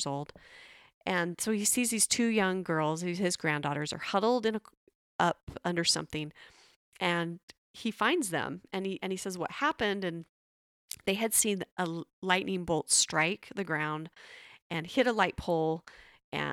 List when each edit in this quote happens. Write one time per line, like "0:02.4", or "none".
none